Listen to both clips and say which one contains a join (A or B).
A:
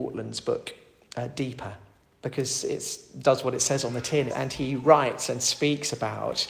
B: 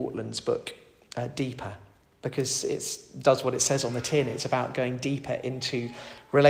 A